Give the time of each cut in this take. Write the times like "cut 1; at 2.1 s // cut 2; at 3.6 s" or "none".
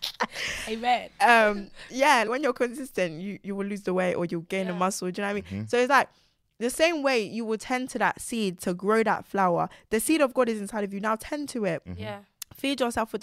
cut 1; at 2.3 s